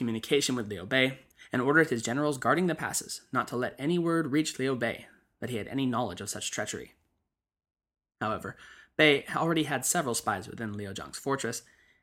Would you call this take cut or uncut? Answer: uncut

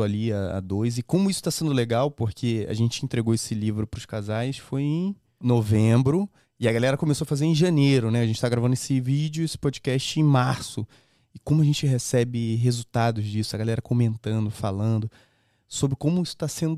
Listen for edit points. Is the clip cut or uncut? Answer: cut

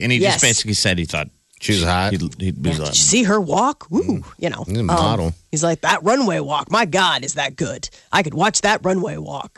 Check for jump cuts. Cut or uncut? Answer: uncut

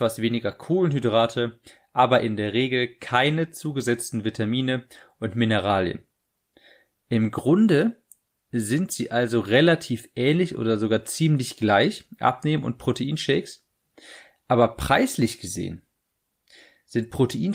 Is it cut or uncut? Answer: uncut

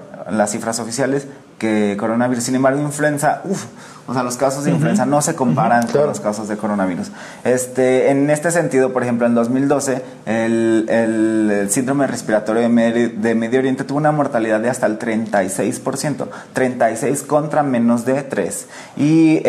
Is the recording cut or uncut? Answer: uncut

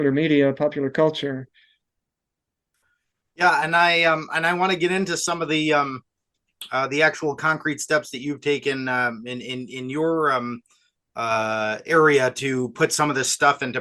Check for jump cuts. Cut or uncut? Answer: uncut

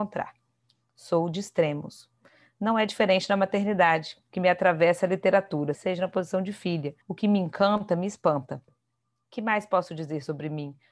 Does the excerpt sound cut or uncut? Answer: cut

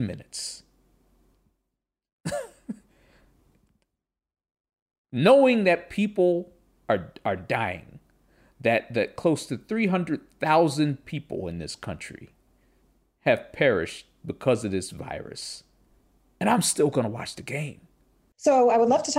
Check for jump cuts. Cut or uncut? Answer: uncut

